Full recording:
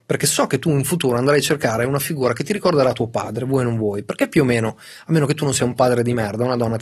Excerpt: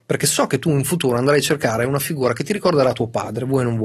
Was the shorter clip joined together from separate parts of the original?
no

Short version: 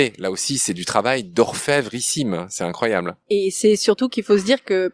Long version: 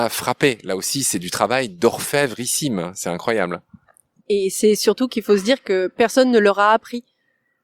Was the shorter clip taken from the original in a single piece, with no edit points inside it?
no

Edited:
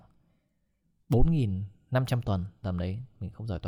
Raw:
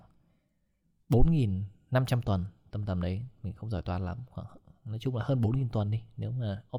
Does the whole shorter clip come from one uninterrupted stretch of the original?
no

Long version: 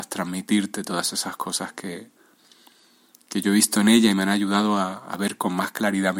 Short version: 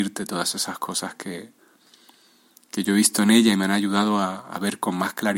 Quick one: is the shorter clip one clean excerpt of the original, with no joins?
yes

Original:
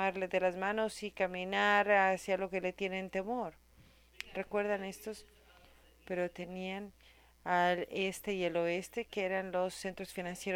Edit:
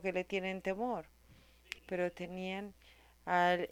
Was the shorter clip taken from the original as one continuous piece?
no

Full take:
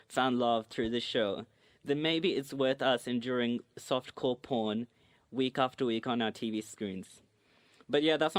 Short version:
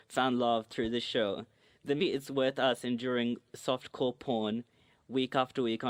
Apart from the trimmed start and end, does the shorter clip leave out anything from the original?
yes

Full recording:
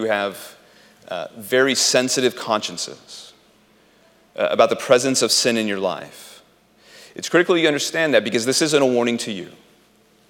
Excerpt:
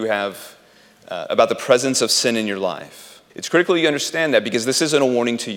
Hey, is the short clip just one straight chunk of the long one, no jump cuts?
no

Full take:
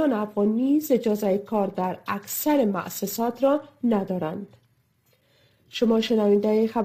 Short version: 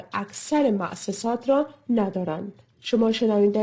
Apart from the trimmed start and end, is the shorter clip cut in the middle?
yes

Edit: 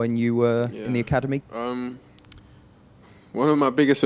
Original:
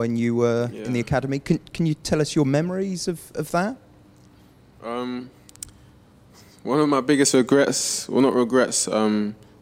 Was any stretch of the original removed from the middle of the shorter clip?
yes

